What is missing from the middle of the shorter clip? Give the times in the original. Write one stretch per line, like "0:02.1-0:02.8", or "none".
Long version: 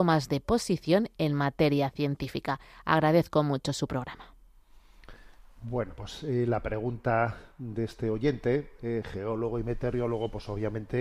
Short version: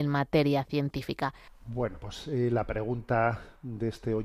0:02.7-0:05.4